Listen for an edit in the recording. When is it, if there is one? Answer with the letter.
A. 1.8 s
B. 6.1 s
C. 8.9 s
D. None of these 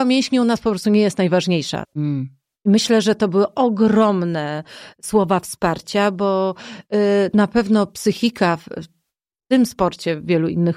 A